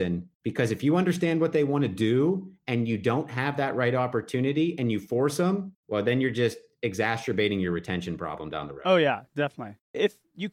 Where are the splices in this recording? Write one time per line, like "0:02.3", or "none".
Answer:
none